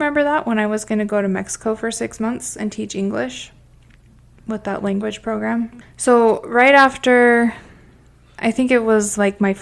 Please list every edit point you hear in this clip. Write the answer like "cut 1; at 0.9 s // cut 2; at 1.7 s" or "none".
cut 1; at 5.8 s

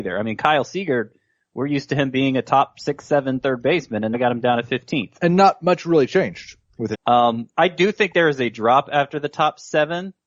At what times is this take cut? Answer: cut 1; at 4.1 s // cut 2; at 6.9 s

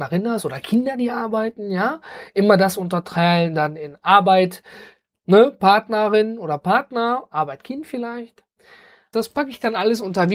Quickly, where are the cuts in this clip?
cut 1; at 9.1 s

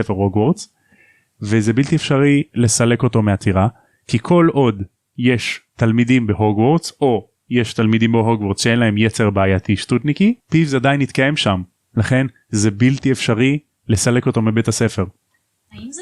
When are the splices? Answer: cut 1; at 10.4 s

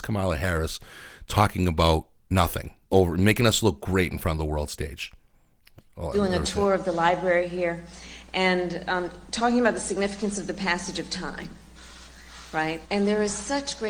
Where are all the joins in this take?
cut 1; at 2.8 s // cut 2; at 5.9 s // cut 3; at 12.8 s

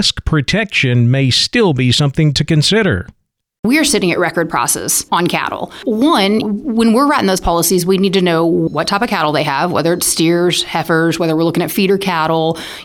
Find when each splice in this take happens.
cut 1; at 5.8 s

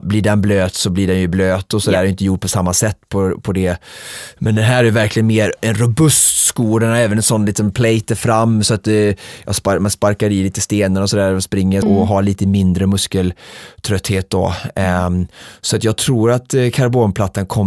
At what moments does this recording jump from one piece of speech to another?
cut 1; at 11.8 s

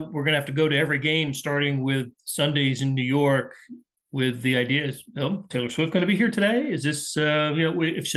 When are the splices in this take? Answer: none

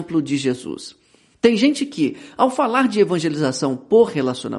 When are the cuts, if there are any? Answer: cut 1; at 1.3 s

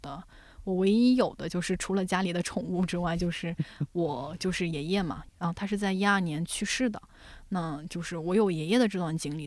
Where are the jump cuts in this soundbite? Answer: none

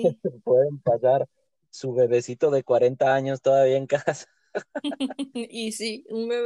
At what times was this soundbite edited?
none

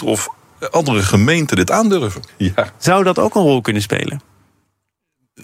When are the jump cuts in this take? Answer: cut 1; at 2.3 s

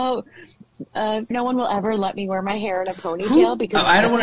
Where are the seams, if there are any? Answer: cut 1; at 1.3 s

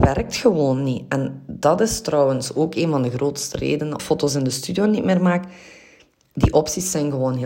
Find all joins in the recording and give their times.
cut 1; at 4.0 s

